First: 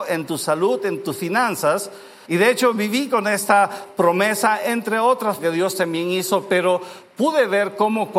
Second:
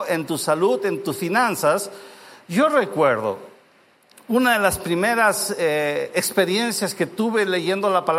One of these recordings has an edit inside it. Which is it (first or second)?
first